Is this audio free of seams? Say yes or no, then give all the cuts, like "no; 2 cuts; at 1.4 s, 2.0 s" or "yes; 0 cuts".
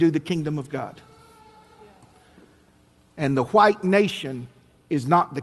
yes; 0 cuts